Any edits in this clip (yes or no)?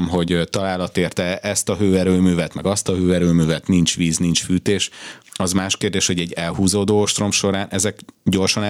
yes